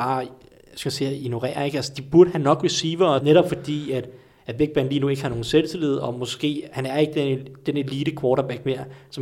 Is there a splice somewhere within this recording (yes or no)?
yes